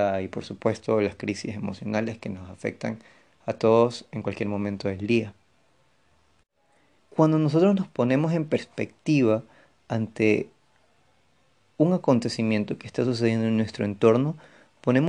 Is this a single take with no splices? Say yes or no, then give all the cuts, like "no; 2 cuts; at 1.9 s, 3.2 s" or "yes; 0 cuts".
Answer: no; 1 cut; at 7.0 s